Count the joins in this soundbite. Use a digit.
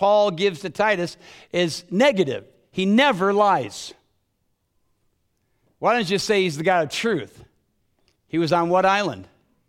1